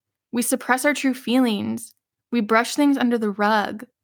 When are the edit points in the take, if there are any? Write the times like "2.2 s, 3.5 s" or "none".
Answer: none